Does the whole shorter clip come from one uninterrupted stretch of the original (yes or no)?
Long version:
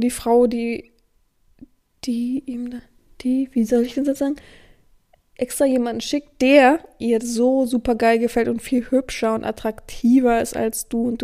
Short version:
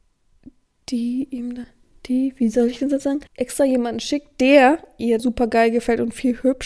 no